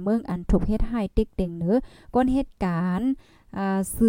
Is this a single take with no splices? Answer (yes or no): yes